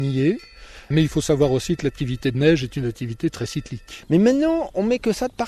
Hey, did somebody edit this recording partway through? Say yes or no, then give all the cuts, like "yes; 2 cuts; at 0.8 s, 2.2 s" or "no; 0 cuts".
yes; 1 cut; at 4.0 s